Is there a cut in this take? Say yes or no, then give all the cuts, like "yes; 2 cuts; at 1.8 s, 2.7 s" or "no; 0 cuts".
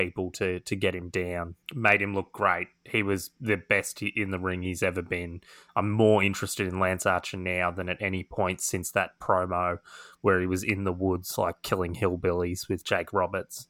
yes; 1 cut; at 1.6 s